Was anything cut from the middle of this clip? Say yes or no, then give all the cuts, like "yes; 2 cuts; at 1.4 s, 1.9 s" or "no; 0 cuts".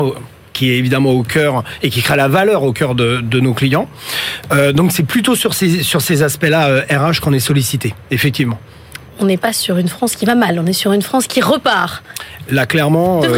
no; 0 cuts